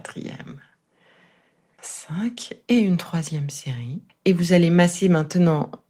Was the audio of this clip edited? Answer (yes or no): yes